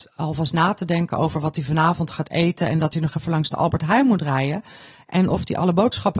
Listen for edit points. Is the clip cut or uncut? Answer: uncut